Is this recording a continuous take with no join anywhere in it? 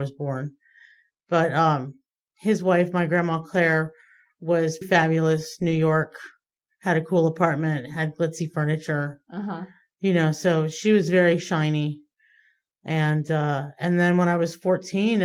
no; 1 cut; at 4.8 s

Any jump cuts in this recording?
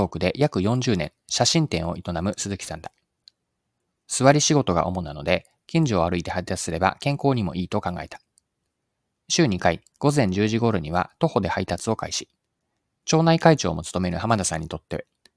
yes; 2 cuts; at 9.9 s, 13.0 s

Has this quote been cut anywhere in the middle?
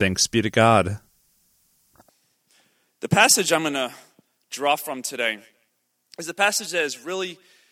no; 0 cuts

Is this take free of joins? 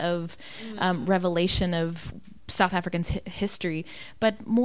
yes; 0 cuts

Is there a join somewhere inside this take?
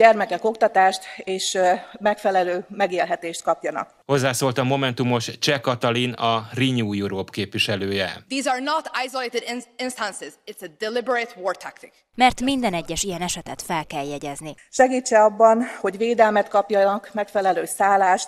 yes; 2 cuts; at 12.1 s, 14.6 s

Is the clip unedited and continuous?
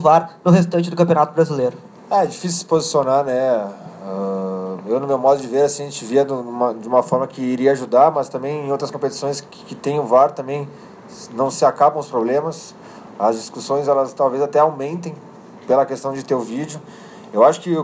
yes; 0 cuts

